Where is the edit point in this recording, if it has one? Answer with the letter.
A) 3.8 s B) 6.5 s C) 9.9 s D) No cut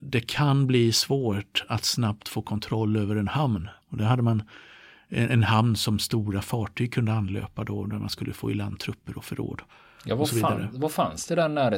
A